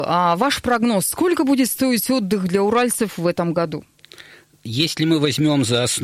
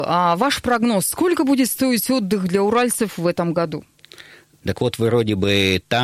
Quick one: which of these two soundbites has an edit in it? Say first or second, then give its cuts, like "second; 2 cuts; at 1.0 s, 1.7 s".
second; 1 cut; at 4.6 s